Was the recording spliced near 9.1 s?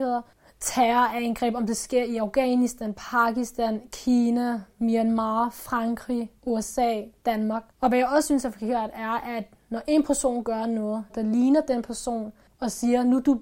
no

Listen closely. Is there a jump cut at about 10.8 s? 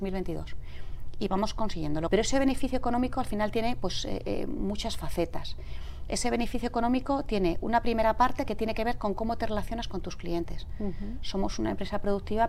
no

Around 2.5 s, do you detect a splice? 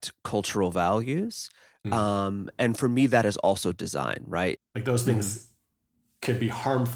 no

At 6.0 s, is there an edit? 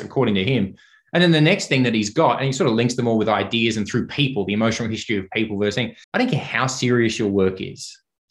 yes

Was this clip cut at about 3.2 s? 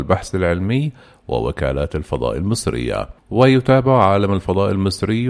yes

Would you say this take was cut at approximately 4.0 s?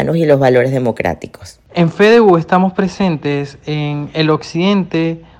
no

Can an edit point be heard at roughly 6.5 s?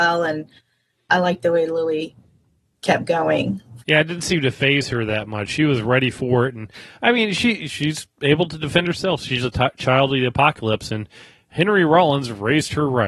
no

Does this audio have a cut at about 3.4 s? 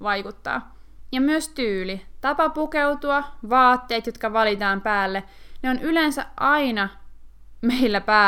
no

